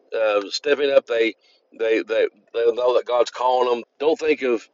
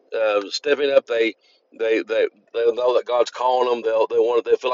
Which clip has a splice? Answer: first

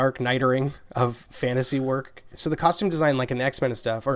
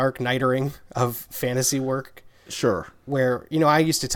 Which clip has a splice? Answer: first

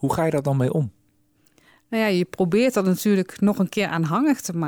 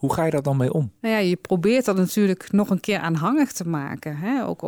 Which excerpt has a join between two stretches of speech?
second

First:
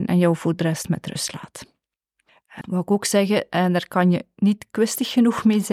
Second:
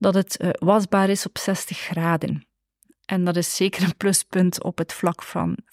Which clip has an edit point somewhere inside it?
first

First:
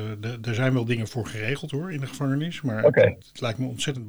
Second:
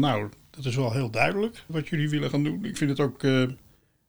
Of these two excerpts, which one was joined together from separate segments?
second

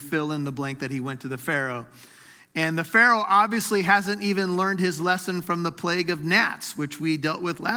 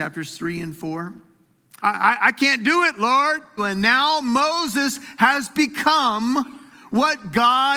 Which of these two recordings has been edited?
second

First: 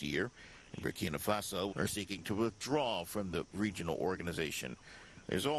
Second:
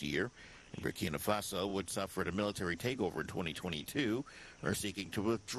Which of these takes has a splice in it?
first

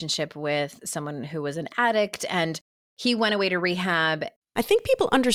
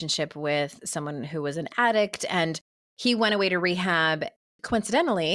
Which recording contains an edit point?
first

